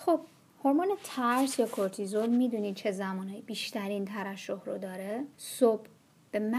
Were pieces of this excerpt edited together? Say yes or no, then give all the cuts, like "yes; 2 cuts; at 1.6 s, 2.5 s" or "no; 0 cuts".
yes; 1 cut; at 5.3 s